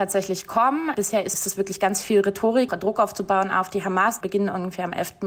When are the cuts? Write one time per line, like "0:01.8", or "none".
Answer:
0:02.7
0:04.2